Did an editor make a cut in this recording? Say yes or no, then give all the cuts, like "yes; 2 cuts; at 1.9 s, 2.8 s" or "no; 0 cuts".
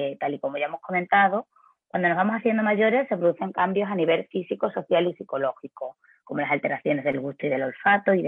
no; 0 cuts